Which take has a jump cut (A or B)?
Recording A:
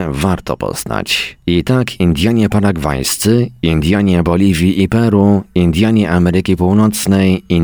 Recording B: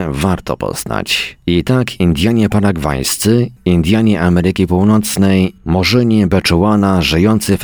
B